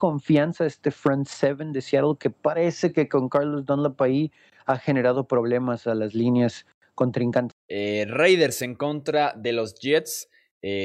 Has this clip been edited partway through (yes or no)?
yes